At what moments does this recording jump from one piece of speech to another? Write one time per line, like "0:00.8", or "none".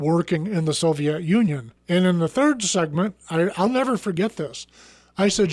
0:01.8